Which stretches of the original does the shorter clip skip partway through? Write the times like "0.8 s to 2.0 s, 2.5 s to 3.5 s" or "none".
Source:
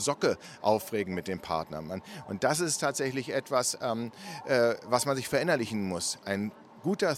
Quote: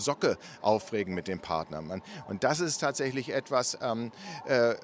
none